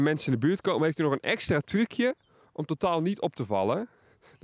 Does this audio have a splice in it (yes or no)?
no